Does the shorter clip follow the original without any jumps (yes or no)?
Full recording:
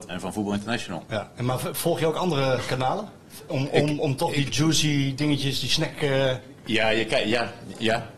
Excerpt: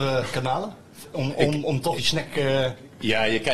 no